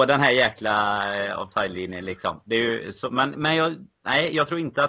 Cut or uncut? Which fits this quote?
uncut